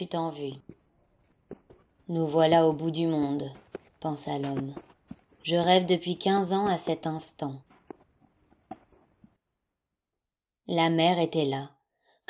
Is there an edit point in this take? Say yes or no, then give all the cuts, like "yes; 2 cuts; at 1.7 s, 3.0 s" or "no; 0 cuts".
no; 0 cuts